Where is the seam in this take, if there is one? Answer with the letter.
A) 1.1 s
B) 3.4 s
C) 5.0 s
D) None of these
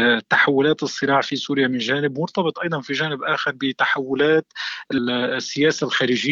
C